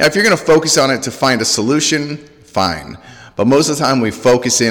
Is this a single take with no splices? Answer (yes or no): yes